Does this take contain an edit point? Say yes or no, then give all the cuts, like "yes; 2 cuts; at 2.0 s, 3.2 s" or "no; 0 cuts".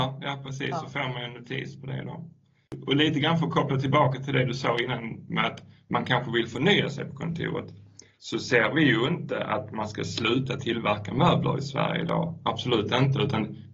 no; 0 cuts